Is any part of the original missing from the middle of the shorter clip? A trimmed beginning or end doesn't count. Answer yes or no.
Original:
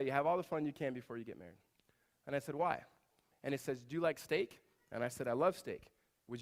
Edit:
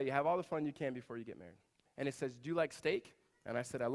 yes